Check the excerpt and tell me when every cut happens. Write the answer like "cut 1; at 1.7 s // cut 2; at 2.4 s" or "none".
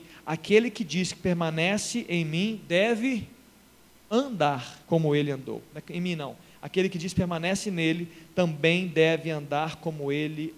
cut 1; at 4.8 s